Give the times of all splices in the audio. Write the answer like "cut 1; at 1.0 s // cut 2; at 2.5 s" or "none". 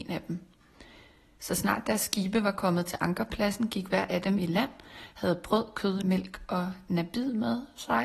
cut 1; at 1.4 s // cut 2; at 6.0 s